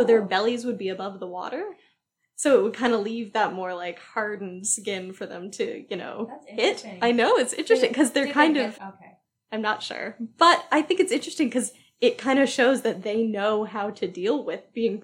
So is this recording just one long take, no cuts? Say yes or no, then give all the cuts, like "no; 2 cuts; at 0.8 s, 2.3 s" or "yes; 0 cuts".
no; 1 cut; at 8.7 s